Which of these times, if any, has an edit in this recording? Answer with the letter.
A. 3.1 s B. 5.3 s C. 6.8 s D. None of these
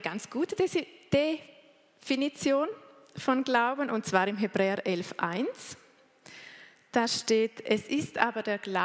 D